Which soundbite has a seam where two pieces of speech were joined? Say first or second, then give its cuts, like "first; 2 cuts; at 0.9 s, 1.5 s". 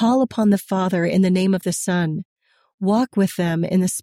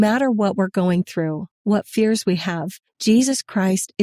second; 1 cut; at 2.9 s